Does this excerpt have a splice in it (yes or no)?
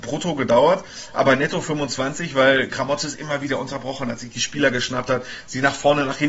no